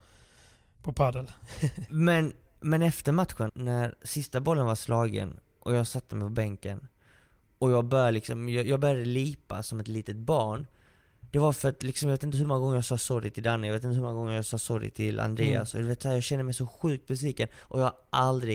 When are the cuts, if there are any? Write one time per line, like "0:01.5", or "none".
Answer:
0:03.5